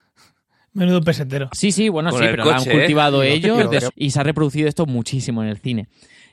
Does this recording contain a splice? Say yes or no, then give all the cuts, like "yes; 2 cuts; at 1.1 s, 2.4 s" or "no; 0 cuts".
yes; 2 cuts; at 1.5 s, 3.9 s